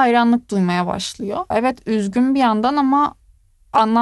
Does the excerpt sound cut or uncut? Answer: cut